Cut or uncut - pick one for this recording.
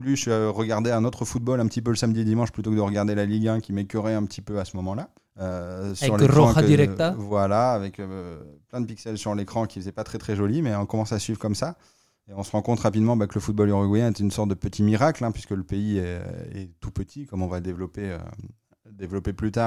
cut